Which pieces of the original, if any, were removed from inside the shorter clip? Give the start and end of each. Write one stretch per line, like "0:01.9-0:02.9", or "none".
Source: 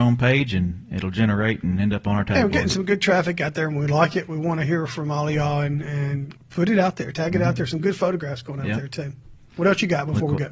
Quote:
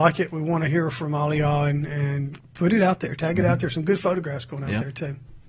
none